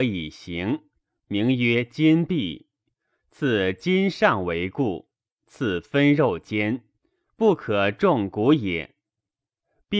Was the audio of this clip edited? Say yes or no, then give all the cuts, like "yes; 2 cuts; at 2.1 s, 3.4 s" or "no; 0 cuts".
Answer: no; 0 cuts